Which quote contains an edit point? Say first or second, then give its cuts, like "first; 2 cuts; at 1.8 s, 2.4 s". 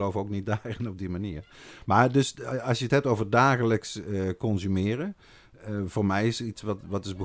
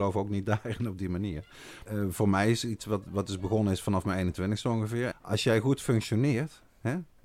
second; 2 cuts; at 1.9 s, 5.1 s